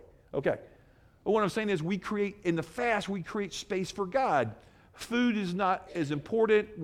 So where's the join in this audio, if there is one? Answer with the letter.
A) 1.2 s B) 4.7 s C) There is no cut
C